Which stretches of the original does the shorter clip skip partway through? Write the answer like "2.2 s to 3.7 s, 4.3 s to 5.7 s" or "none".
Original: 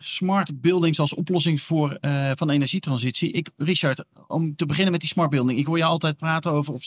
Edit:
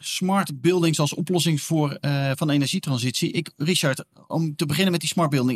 none